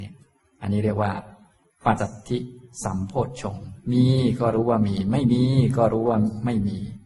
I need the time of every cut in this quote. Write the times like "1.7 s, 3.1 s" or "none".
2.0 s

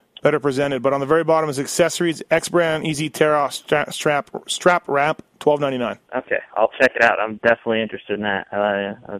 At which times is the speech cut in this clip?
6.0 s

